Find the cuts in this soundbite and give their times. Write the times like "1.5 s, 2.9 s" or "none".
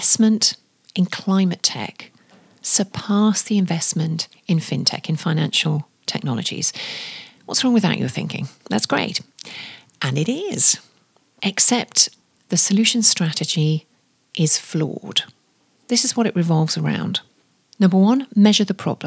12.4 s